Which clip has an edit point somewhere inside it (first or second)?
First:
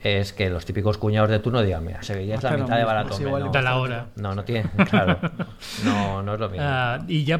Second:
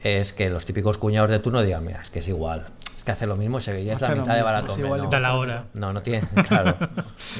first